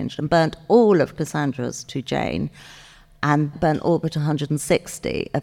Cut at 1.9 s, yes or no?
no